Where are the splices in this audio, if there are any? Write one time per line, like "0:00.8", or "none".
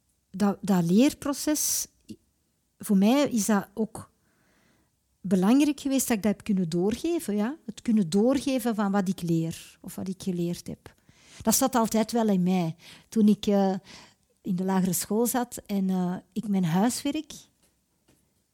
0:14.4